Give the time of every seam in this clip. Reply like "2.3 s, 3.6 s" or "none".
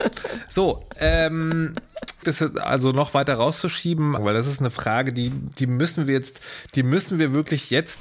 2.2 s, 4.2 s